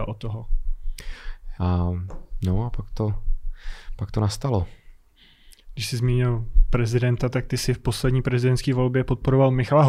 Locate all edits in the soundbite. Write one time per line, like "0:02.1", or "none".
0:01.6